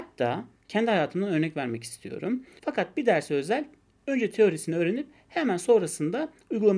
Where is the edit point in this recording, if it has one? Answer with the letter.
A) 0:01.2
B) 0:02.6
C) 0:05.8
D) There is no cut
B